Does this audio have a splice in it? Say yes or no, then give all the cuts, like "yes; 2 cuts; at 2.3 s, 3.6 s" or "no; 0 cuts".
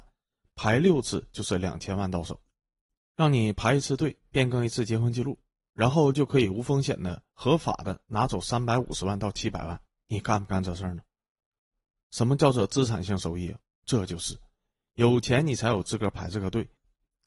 no; 0 cuts